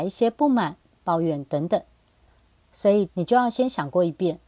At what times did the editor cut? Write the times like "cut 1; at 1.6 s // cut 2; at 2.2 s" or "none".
cut 1; at 3.1 s